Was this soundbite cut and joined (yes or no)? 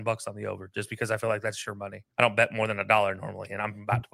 yes